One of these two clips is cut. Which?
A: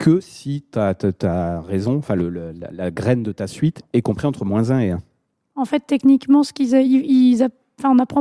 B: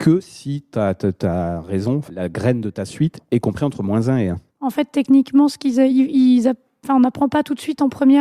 B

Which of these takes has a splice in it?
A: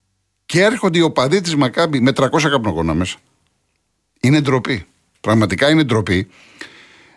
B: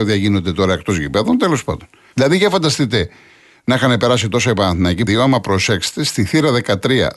B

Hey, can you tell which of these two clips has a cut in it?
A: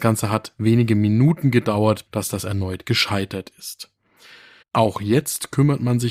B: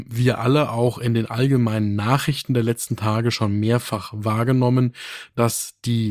A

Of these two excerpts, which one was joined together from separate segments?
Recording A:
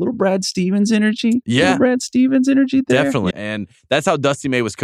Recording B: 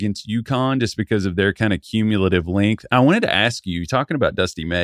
A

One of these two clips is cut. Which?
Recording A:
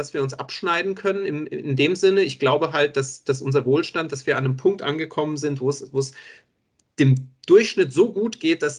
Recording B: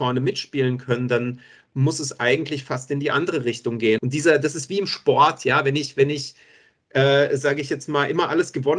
B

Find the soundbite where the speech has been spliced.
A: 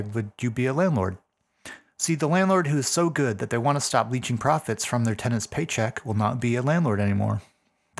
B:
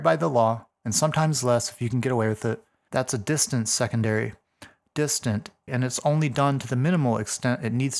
B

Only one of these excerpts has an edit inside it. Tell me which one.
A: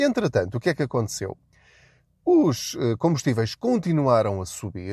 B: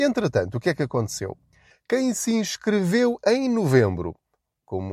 B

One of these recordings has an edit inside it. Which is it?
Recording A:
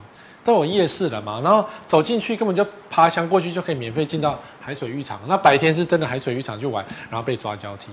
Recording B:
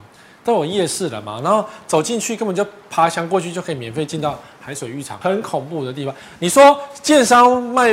B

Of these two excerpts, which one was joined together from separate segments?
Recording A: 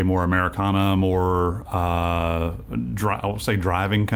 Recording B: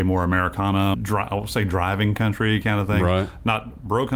B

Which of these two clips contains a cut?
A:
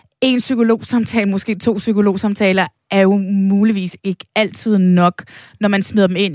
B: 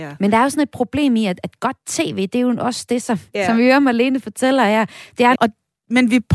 B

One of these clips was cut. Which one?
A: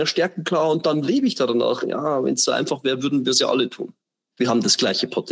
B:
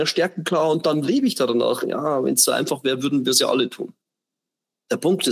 A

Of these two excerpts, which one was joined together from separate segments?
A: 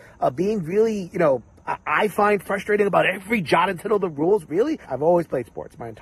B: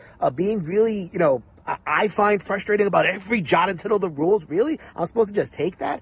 A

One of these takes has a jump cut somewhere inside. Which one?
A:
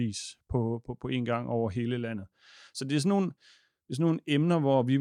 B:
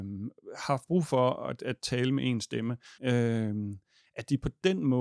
B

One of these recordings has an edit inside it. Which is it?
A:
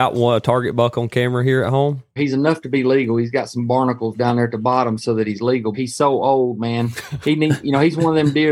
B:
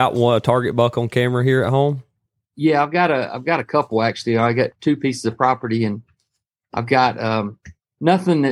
A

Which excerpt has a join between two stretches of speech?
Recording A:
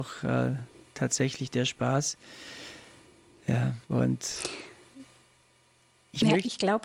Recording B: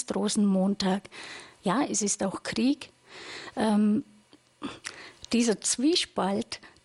A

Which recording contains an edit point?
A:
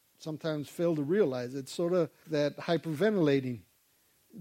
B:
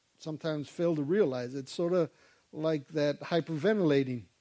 A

